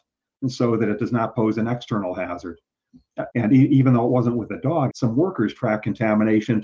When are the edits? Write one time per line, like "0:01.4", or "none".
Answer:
0:03.3
0:04.9